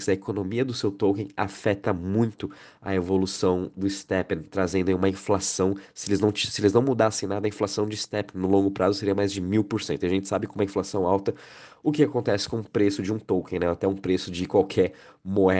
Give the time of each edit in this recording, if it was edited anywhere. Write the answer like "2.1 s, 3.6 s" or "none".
none